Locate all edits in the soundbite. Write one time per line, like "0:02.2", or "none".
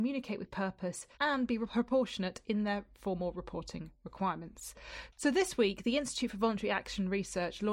0:05.2